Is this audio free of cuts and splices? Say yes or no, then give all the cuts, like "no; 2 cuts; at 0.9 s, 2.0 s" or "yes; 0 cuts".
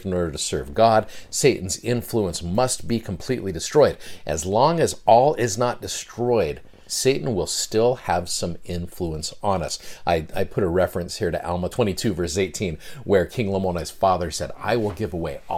yes; 0 cuts